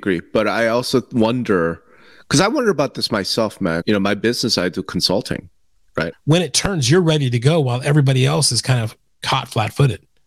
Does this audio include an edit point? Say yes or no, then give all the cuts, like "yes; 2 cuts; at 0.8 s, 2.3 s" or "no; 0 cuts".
yes; 2 cuts; at 3.8 s, 6.1 s